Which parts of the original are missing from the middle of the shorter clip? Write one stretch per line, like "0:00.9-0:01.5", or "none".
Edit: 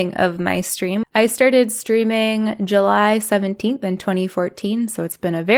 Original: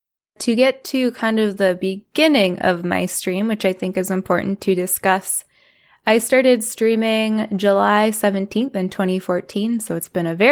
0:03.5-0:05.9